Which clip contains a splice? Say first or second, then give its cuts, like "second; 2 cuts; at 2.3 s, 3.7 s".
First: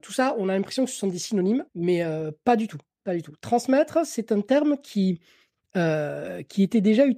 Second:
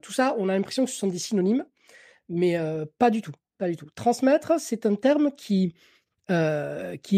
first; 1 cut; at 1.7 s